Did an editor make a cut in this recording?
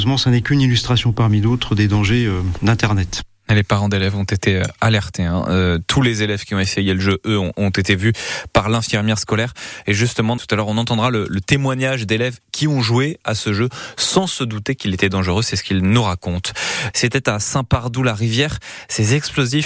yes; 2 cuts; at 10.4 s, 16.9 s

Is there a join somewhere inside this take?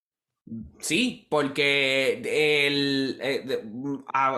no; 0 cuts

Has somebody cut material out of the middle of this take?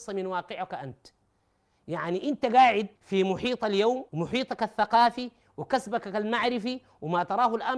yes; 2 cuts; at 3.0 s, 4.1 s

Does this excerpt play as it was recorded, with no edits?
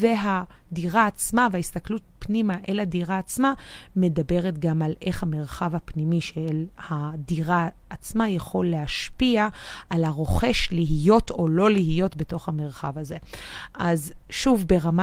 yes; 0 cuts

